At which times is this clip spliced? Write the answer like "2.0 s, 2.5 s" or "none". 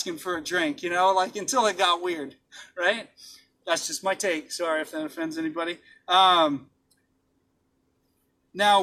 none